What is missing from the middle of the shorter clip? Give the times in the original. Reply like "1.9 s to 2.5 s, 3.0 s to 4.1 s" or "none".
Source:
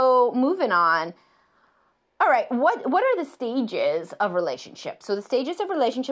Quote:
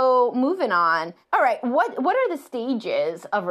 1.2 s to 2.1 s

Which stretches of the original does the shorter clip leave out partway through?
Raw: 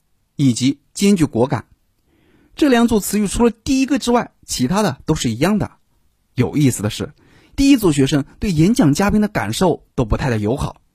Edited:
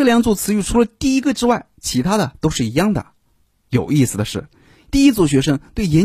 none

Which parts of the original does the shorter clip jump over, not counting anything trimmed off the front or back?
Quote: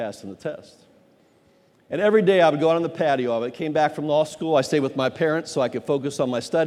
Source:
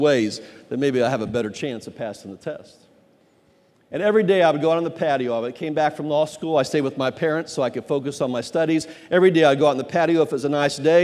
none

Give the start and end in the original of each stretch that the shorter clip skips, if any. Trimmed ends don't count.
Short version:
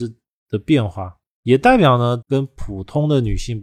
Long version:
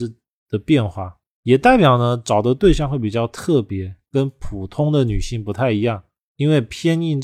2.2 s to 4.1 s

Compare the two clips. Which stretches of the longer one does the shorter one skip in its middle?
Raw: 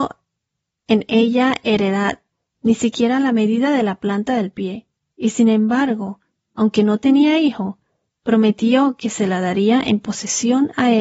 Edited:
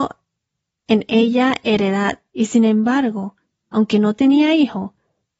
2.3 s to 5.2 s

